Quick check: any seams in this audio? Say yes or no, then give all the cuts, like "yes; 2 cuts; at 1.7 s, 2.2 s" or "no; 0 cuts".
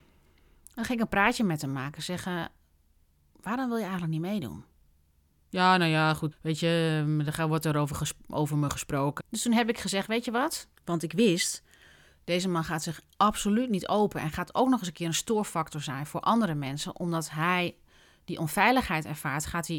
yes; 3 cuts; at 6.3 s, 9.2 s, 10.8 s